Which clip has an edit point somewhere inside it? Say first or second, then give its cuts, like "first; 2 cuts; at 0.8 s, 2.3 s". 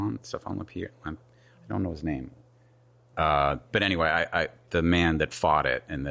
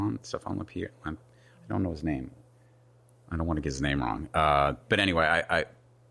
first; 2 cuts; at 3.1 s, 4.6 s